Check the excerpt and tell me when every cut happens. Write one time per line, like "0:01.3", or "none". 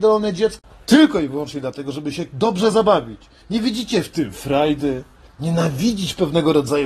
none